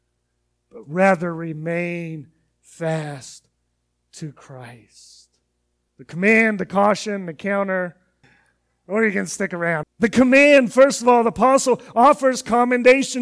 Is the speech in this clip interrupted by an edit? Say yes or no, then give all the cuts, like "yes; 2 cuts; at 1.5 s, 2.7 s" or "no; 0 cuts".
yes; 3 cuts; at 5.9 s, 8.2 s, 9.8 s